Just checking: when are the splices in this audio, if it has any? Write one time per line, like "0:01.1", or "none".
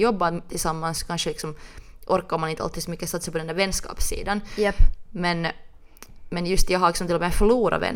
none